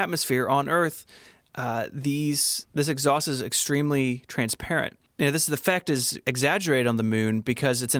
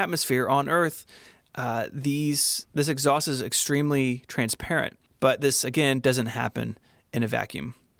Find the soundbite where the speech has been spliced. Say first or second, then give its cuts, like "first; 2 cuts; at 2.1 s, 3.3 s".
second; 1 cut; at 5.1 s